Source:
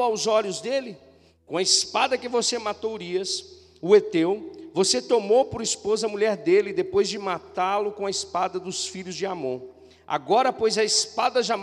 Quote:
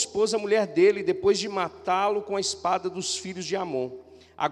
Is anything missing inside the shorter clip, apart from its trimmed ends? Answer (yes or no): no